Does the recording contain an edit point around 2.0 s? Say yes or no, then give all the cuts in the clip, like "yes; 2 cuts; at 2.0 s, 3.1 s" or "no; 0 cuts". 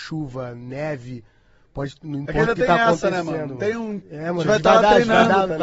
no; 1 cut; at 4.0 s